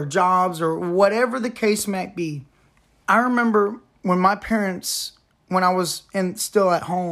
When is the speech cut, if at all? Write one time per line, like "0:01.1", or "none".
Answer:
0:03.0